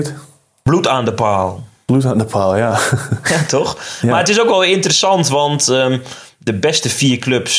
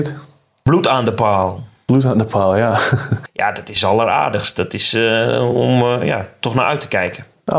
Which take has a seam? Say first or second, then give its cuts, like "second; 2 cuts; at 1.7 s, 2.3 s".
second; 1 cut; at 3.3 s